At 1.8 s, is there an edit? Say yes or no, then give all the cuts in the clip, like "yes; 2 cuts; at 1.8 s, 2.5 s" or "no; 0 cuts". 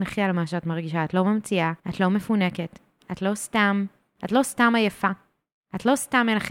yes; 1 cut; at 1.8 s